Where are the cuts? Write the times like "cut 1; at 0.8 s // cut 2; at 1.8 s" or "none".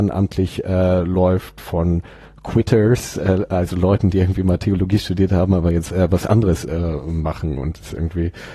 none